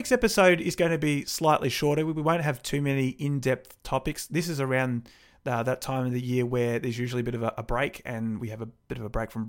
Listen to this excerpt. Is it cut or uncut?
uncut